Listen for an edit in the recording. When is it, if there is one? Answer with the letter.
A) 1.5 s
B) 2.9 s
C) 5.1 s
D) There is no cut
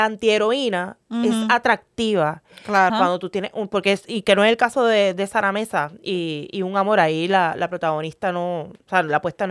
B